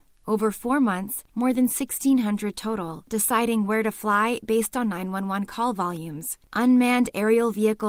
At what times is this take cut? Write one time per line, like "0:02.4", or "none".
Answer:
0:01.3
0:06.4